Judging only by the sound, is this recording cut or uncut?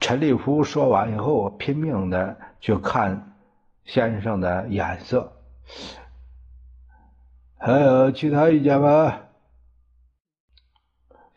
uncut